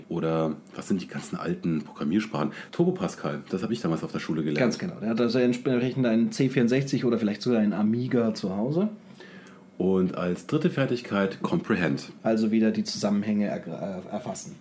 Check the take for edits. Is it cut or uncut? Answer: uncut